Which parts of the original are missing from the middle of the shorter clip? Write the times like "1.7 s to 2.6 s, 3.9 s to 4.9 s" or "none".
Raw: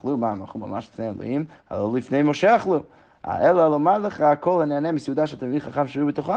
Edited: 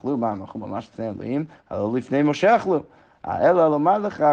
none